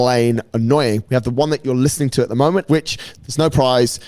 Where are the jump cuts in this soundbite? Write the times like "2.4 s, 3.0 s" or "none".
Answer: 1.0 s, 2.7 s